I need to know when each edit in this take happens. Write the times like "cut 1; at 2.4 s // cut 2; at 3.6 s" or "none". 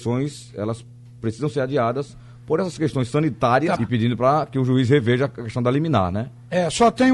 cut 1; at 3.8 s